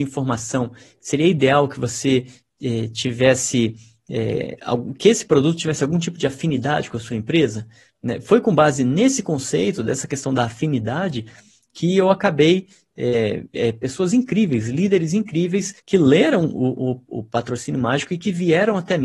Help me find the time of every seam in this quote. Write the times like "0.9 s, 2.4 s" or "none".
13.5 s, 15.8 s